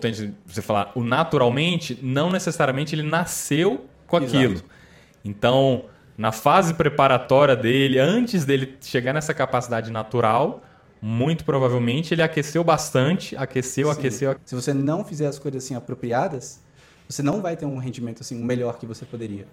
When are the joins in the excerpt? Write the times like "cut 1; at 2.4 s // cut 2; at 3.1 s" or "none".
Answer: cut 1; at 14.4 s